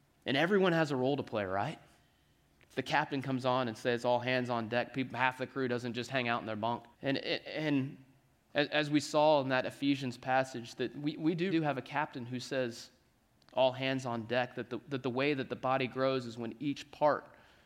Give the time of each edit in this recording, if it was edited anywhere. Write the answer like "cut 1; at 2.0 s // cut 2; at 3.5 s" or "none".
cut 1; at 6.9 s // cut 2; at 11.5 s

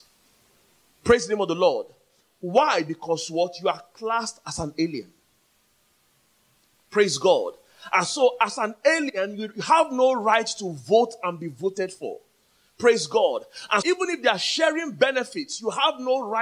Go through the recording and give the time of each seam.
cut 1; at 13.8 s

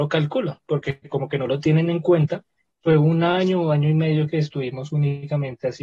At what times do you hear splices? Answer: cut 1; at 2.7 s

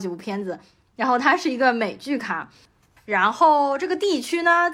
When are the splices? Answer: cut 1; at 3.0 s

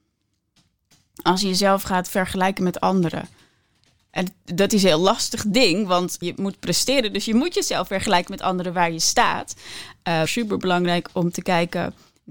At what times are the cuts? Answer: cut 1; at 6.2 s // cut 2; at 10.3 s

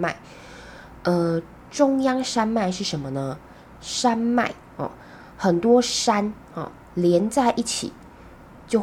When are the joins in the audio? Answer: none

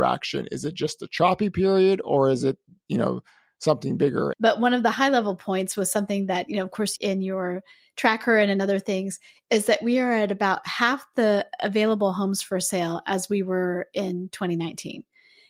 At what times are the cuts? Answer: cut 1; at 4.3 s // cut 2; at 7.0 s

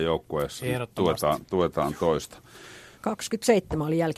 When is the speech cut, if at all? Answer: cut 1; at 3.0 s

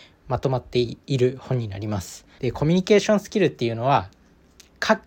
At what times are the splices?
cut 1; at 2.4 s

